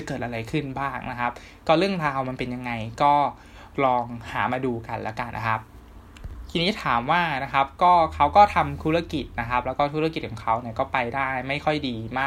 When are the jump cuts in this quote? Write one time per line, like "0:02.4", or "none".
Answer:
0:05.3